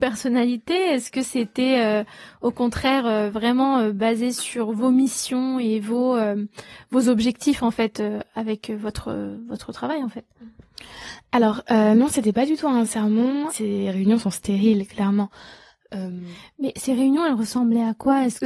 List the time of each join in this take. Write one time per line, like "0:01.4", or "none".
0:13.5